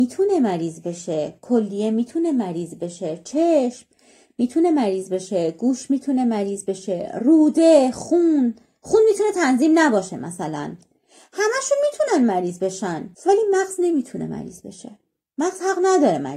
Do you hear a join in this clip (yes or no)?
yes